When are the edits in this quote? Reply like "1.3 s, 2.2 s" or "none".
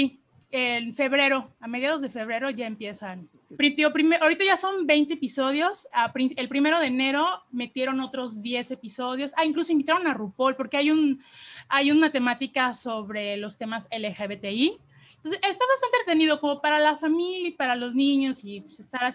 3.6 s